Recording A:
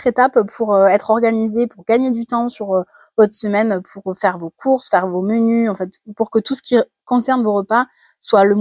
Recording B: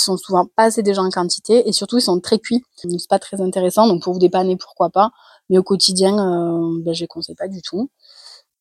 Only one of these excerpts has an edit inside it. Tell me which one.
B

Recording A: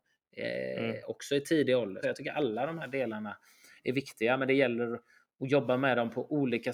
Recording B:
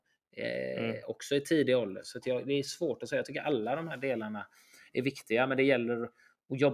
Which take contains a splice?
A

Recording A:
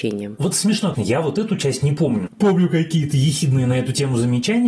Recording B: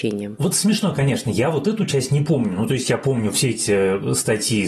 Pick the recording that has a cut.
A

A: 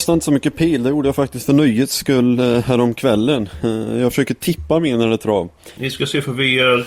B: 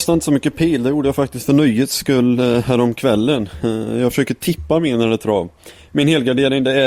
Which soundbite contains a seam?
A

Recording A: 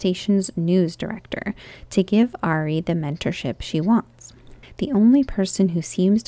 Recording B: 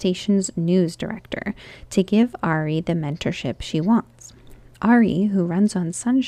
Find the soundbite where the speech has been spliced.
A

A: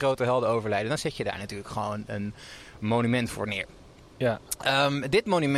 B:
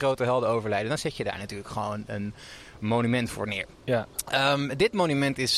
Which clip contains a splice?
B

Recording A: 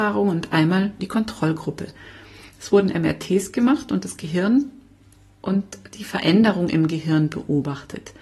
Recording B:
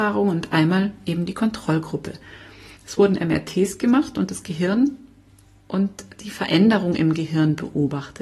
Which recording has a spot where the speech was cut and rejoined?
A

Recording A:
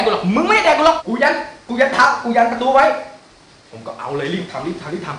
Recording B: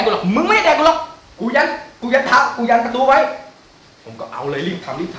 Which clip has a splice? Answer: A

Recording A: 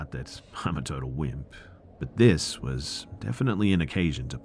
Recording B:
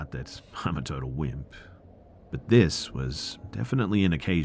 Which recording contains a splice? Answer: A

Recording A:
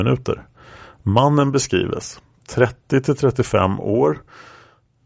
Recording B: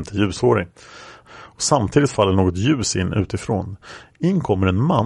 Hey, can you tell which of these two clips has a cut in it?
B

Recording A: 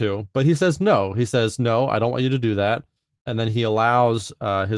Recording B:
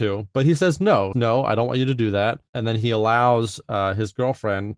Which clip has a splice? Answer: B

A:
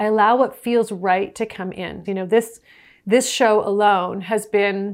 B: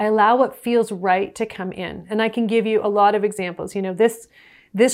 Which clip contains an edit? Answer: A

